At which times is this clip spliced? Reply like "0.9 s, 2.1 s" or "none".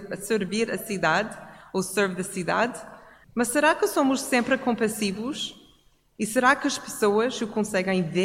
3.2 s